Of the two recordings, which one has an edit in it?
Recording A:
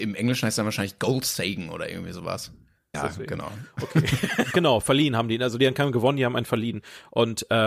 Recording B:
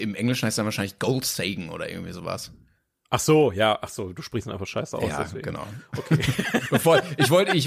A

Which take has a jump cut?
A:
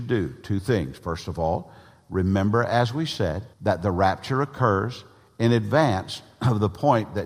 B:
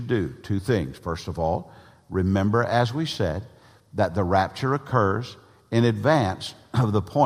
A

